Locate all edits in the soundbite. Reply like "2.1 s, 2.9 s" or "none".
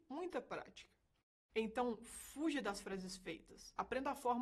none